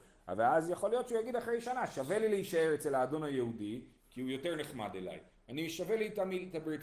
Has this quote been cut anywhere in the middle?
no; 0 cuts

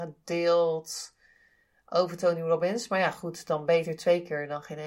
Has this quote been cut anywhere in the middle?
no; 0 cuts

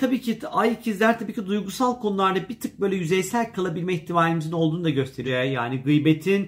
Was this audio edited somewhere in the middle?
yes; 1 cut; at 5.3 s

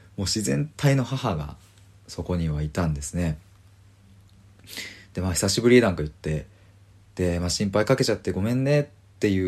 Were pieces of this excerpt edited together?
no; 0 cuts

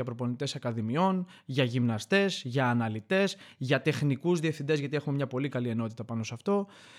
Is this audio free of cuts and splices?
yes; 0 cuts

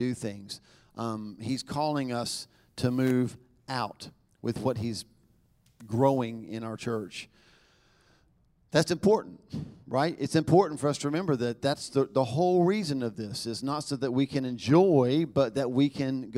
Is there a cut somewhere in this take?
no; 0 cuts

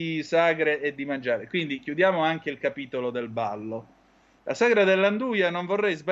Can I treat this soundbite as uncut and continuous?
no; 1 cut; at 4.4 s

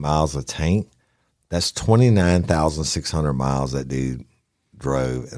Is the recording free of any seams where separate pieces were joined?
yes; 0 cuts

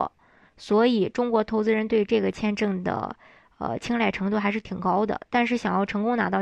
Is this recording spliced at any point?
no; 0 cuts

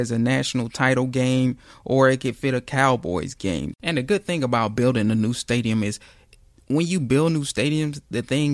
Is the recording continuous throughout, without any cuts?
no; 1 cut; at 3.7 s

